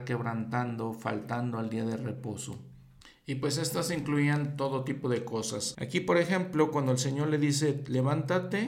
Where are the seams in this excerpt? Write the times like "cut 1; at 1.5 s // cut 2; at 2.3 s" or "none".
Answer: cut 1; at 5.7 s